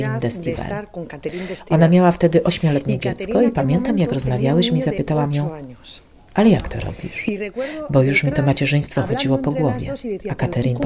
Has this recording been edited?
no; 0 cuts

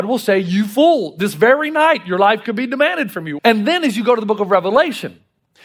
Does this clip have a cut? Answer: yes; 1 cut; at 3.4 s

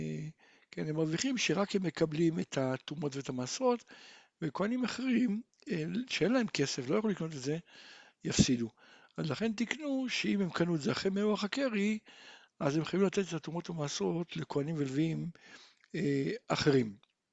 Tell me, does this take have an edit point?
no; 0 cuts

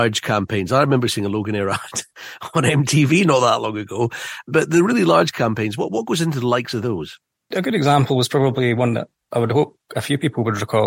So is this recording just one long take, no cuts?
yes; 0 cuts

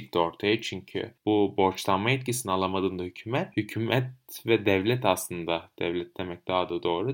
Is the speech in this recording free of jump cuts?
yes; 0 cuts

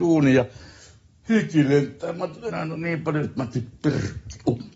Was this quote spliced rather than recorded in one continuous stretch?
yes; 1 cut; at 2.5 s

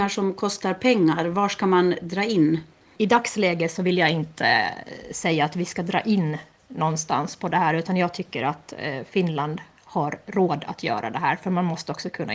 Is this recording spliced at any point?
yes; 1 cut; at 3.0 s

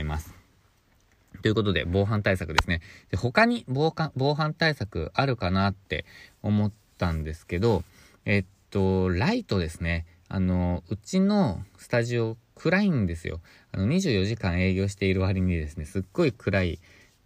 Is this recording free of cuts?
yes; 0 cuts

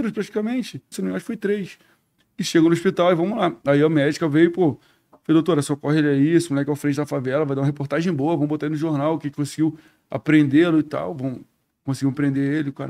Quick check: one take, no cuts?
no; 1 cut; at 0.9 s

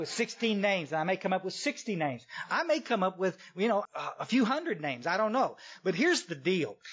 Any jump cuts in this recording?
yes; 1 cut; at 3.9 s

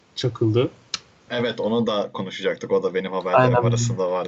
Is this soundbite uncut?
no; 1 cut; at 1.3 s

